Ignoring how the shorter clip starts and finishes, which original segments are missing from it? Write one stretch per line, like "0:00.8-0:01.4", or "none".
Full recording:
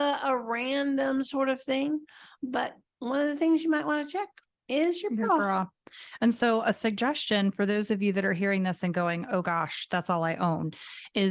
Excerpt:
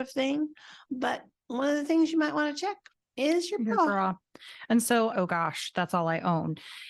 0:06.6-0:09.3